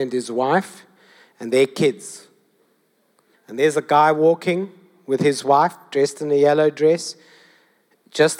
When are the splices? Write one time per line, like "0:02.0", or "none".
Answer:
0:03.3